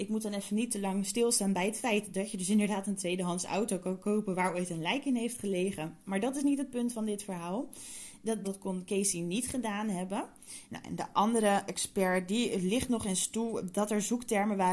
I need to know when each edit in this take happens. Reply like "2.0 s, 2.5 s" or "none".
8.4 s, 10.7 s

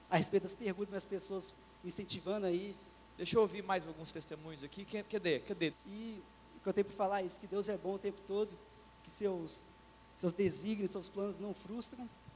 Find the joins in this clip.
3.0 s, 5.7 s, 8.9 s

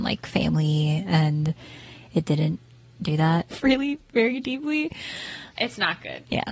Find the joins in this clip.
3.5 s, 5.6 s

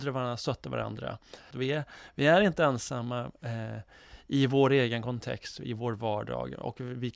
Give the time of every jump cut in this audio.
1.5 s

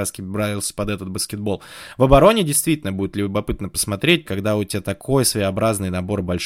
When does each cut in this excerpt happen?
4.3 s

